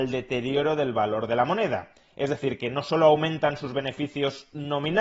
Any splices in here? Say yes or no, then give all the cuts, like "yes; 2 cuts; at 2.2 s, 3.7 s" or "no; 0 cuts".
no; 0 cuts